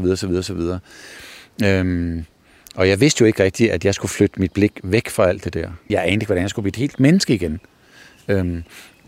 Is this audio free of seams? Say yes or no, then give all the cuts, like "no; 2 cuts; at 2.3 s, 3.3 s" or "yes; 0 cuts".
no; 1 cut; at 5.9 s